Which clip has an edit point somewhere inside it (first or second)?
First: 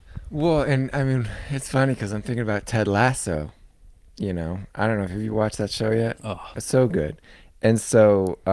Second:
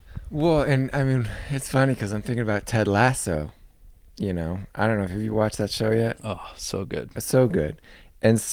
first